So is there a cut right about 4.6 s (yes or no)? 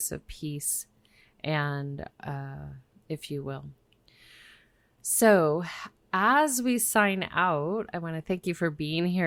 no